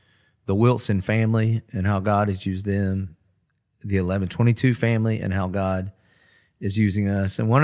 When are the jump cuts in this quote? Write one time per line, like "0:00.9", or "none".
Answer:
none